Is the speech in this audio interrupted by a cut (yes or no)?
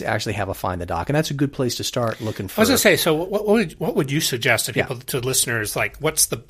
no